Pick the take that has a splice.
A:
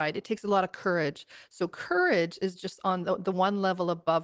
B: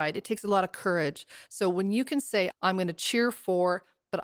B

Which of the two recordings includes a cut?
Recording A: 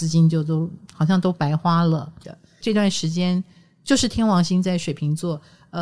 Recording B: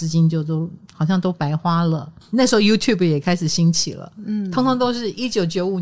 A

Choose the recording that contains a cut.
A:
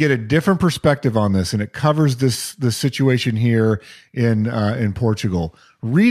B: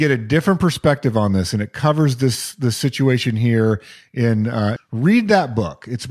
B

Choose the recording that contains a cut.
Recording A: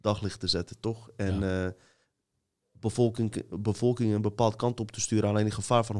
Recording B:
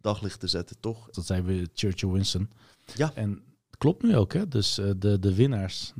B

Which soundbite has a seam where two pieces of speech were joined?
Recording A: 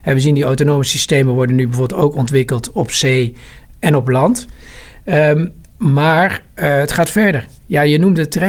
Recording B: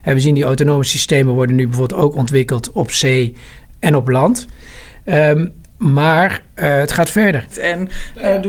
B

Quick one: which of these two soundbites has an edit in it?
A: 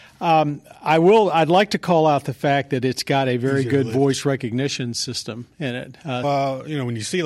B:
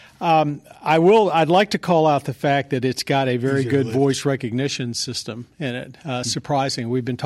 A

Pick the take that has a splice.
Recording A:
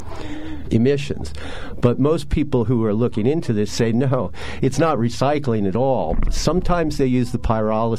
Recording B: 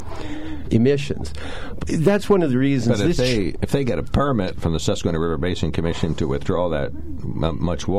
B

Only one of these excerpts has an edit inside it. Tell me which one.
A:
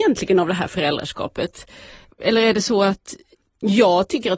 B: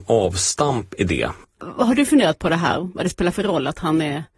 B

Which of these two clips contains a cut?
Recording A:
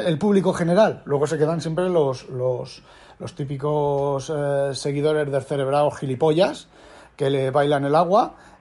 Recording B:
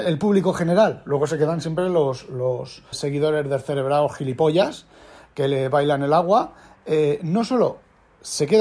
B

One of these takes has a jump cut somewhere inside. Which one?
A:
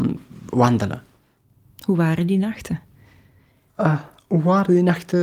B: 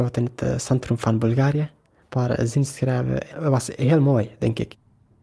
B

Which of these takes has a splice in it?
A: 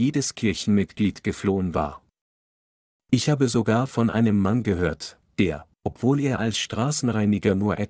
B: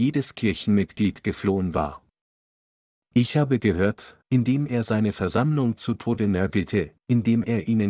B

